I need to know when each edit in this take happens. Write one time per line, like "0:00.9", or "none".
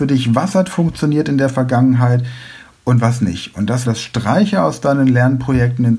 0:03.8